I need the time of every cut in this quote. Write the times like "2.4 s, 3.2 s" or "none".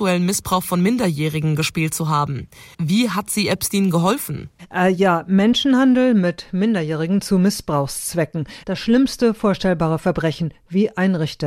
2.7 s, 8.6 s